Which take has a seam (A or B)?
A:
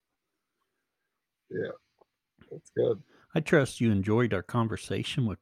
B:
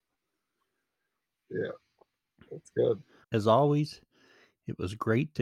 B